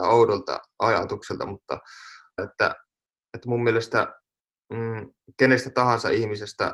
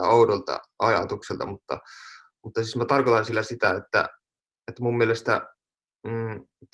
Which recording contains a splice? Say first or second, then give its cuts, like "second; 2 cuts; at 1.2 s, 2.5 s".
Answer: first; 1 cut; at 2.4 s